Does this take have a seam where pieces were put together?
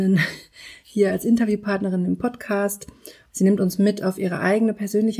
yes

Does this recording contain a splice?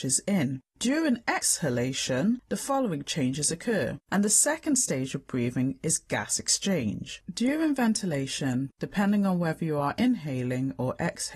yes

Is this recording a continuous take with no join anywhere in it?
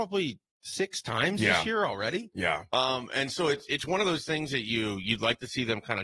yes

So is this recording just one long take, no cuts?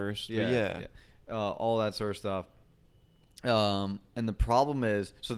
yes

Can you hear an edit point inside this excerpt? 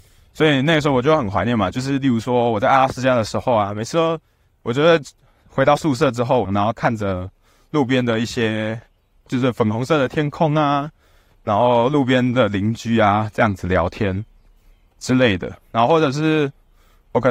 yes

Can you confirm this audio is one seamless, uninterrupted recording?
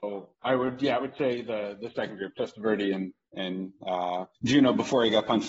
no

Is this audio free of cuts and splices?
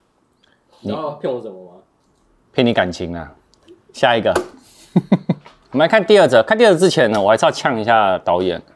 yes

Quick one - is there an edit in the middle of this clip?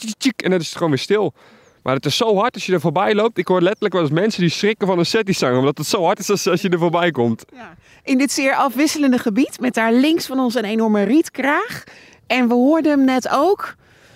no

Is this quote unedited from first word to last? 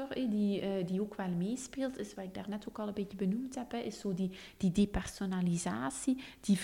yes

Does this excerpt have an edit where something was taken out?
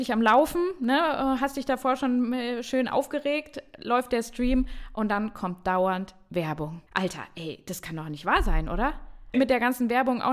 yes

